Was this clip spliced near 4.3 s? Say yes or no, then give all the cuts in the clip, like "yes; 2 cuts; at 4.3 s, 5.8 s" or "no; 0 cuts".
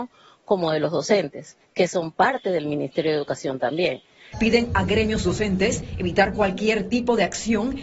yes; 1 cut; at 4.3 s